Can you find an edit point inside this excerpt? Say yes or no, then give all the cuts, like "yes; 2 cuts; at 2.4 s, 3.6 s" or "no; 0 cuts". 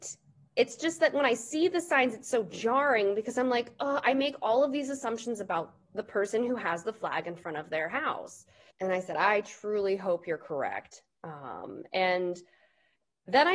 yes; 1 cut; at 8.7 s